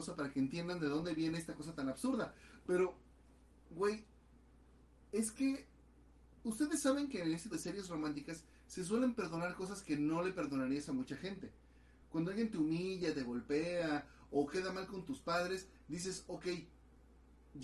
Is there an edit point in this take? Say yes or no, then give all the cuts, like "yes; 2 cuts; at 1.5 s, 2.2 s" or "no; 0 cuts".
yes; 1 cut; at 7.5 s